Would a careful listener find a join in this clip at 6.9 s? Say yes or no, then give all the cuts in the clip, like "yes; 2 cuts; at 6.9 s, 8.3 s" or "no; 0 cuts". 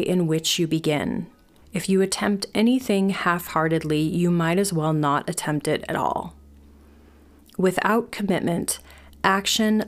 no; 1 cut; at 1.6 s